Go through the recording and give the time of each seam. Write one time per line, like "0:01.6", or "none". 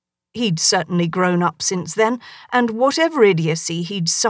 none